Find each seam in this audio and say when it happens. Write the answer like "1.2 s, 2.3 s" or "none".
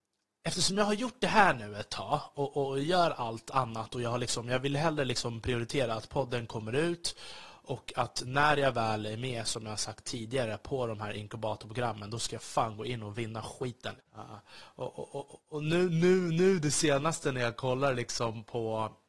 14.0 s